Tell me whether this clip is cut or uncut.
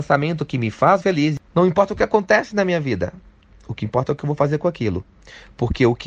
cut